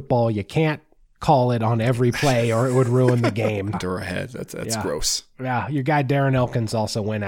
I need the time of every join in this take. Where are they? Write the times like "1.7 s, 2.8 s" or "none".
3.7 s

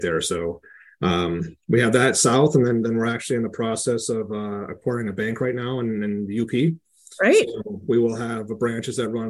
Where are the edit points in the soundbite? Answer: none

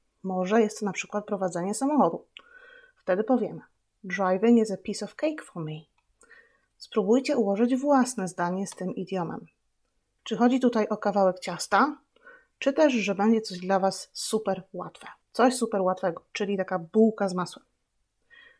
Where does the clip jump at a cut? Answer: 10.2 s, 15.2 s

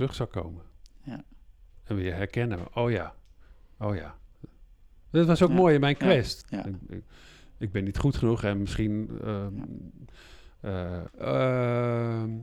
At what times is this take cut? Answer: 6.4 s, 11.1 s

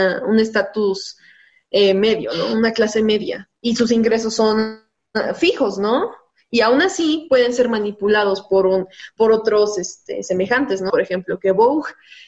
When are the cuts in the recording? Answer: 10.9 s

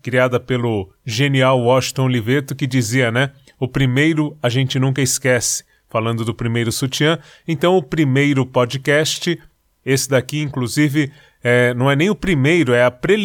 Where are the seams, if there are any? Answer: none

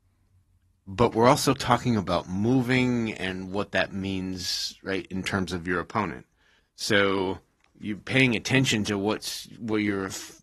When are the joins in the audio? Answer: 6.6 s

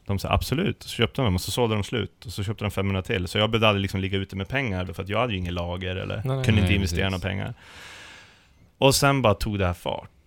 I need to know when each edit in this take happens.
4.9 s

